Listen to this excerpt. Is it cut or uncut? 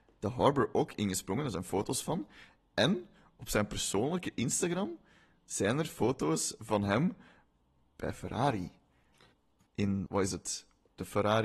cut